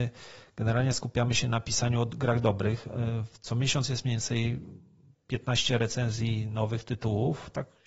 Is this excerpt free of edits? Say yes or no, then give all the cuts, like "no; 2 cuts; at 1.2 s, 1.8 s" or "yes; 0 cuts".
yes; 0 cuts